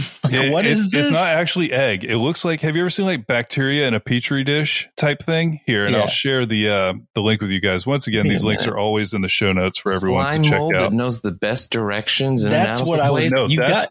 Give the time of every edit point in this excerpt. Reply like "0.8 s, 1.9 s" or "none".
none